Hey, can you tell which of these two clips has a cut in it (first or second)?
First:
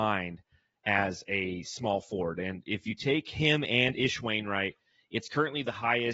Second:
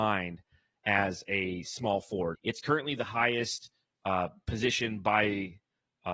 second